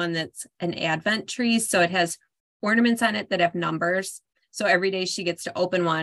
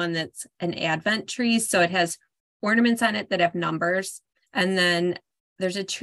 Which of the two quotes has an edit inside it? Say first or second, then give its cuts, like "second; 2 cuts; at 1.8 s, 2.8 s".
second; 1 cut; at 4.5 s